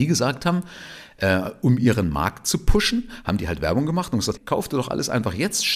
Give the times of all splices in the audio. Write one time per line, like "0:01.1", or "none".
0:04.4